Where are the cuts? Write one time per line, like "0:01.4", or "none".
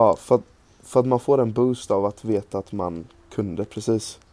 none